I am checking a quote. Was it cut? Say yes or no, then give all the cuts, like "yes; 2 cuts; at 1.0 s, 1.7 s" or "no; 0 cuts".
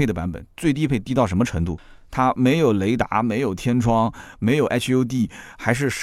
no; 0 cuts